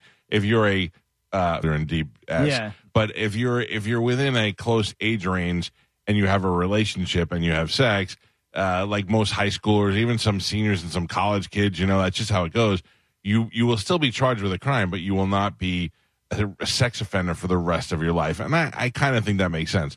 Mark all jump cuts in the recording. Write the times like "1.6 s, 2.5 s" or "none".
1.6 s